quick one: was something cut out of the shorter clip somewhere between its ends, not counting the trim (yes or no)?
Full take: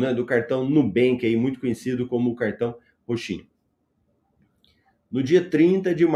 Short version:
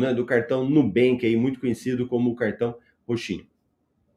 no